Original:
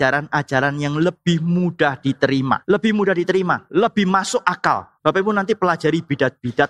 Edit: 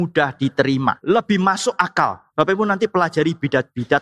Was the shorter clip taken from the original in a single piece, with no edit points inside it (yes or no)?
no